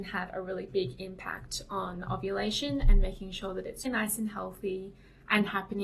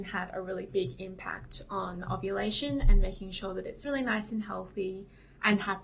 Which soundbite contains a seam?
first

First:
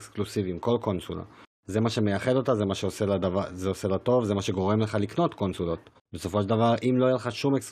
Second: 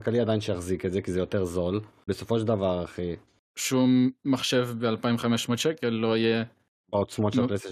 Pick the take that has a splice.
second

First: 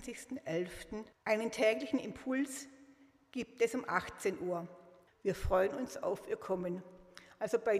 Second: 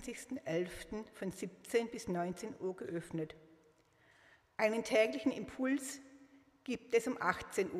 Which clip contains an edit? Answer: first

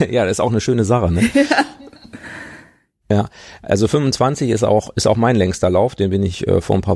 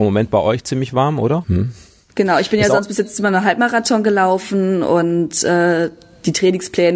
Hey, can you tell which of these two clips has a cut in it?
second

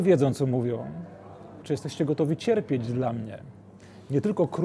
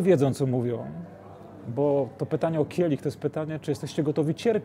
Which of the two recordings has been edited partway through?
first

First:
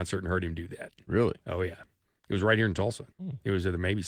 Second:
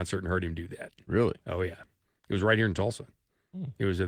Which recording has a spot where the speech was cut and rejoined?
first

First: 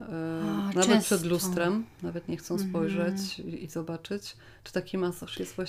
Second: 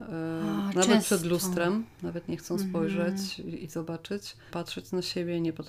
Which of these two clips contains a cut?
second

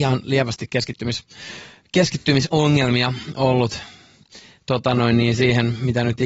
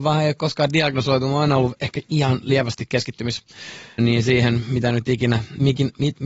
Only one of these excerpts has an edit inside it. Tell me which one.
second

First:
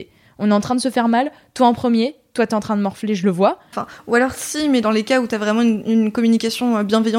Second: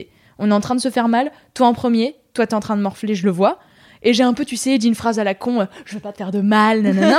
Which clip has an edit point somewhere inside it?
first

